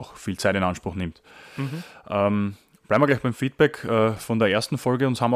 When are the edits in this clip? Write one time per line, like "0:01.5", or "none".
none